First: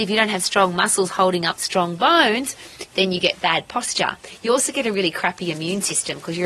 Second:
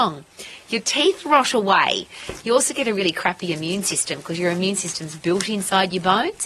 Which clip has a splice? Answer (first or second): second